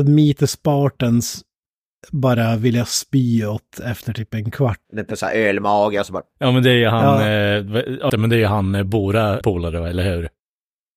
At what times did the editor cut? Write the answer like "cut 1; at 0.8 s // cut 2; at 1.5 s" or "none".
cut 1; at 4.9 s // cut 2; at 8.1 s // cut 3; at 9.4 s

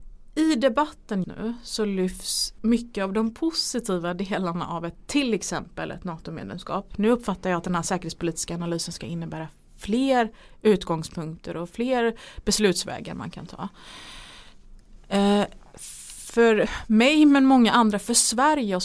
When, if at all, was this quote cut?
cut 1; at 1.2 s // cut 2; at 2.6 s

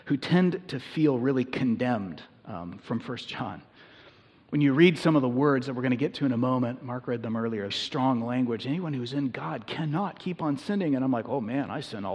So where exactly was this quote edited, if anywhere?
cut 1; at 7.7 s

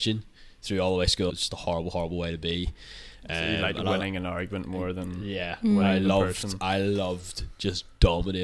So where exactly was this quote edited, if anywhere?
cut 1; at 1.3 s

